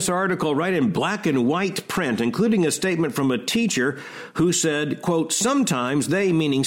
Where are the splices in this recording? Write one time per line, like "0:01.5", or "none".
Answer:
none